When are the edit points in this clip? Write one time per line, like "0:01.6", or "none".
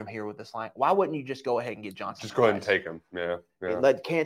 none